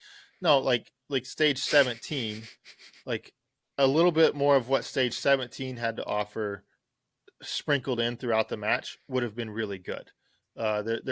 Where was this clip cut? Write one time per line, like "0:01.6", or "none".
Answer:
none